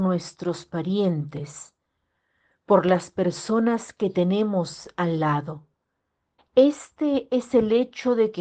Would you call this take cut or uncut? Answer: cut